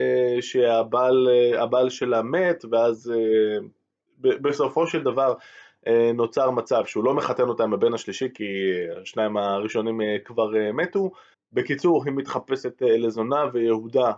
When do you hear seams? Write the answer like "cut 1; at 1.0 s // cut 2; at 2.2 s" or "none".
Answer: cut 1; at 11.3 s